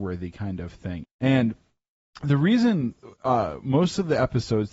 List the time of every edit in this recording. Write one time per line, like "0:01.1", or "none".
0:01.0